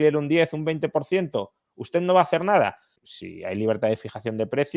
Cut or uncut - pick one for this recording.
cut